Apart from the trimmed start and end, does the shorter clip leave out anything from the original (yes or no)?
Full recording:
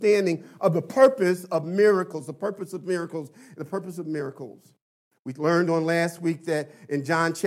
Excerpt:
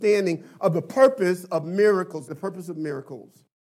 yes